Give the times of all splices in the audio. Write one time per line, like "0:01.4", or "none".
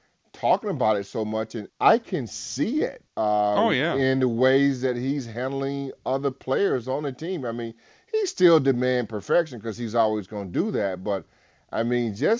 0:01.7
0:03.1